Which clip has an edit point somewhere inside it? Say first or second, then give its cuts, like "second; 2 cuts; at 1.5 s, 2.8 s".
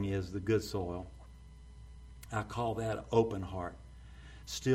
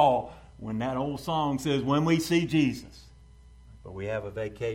second; 1 cut; at 3.8 s